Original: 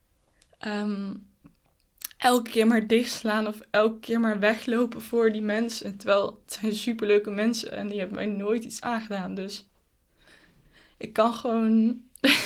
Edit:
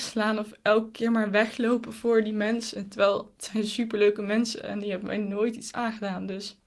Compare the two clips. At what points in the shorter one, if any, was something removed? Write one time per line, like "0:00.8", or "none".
none